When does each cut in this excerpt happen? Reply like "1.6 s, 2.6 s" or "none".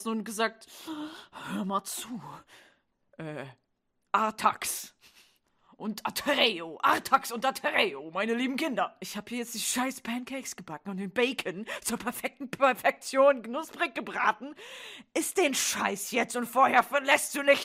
none